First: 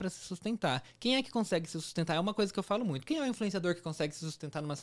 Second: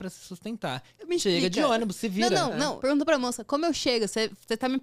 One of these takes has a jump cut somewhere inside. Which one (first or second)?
second